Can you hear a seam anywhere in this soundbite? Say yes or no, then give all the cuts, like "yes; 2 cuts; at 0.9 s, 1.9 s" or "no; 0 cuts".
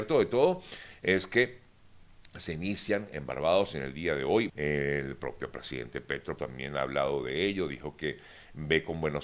yes; 2 cuts; at 4.5 s, 6.4 s